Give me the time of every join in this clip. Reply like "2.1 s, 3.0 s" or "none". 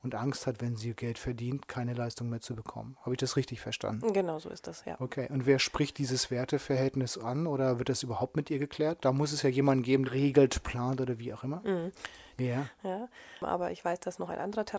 10.0 s, 12.4 s

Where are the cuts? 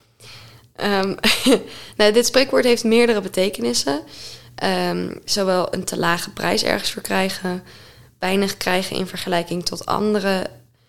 none

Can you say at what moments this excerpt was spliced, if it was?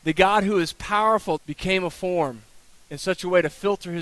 1.4 s

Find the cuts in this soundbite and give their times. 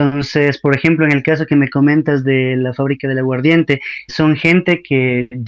4.1 s

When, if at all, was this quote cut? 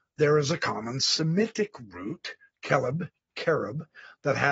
none

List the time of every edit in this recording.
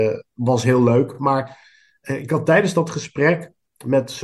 none

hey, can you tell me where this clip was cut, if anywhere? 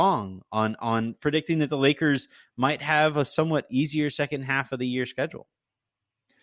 none

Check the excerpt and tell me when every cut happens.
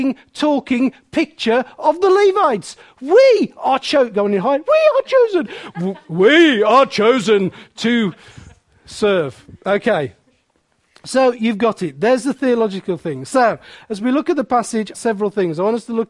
14.9 s

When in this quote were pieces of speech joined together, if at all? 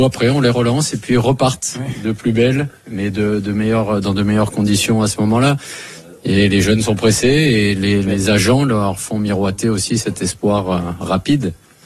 none

